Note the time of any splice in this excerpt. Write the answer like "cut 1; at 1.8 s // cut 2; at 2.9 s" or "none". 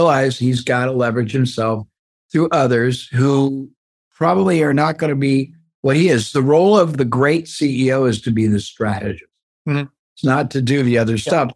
none